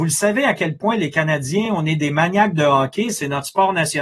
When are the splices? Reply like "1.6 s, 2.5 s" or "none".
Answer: none